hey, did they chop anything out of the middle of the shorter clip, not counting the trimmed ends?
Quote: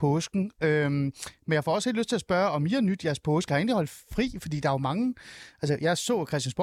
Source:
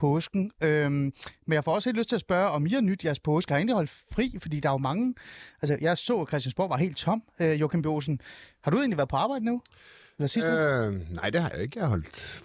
no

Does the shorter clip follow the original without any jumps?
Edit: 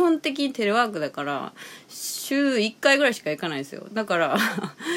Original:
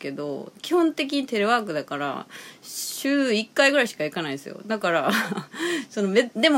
yes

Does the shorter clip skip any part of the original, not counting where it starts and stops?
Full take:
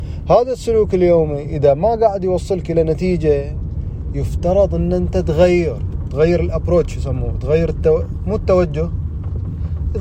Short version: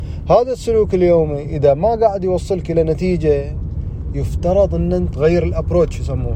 yes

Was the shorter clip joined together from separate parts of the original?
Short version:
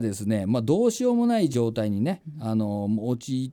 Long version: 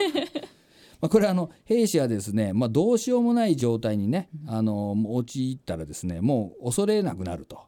no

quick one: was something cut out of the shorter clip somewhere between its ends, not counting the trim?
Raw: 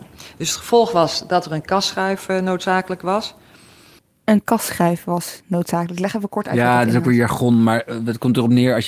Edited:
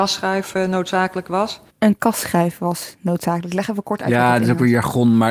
yes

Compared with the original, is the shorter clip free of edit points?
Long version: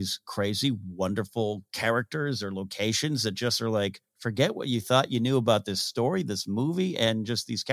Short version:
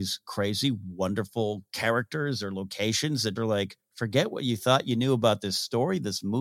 no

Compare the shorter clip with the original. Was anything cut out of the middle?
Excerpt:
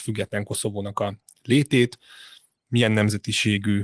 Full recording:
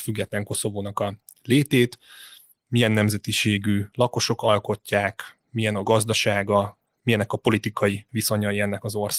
no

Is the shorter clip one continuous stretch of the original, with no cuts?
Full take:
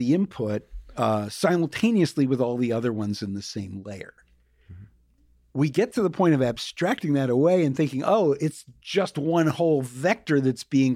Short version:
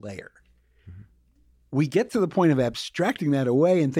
yes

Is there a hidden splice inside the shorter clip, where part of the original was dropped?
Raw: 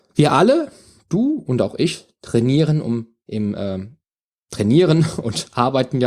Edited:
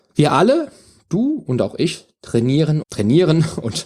yes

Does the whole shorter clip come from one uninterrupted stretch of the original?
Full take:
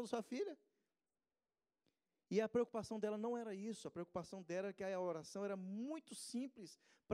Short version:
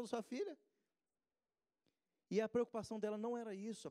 yes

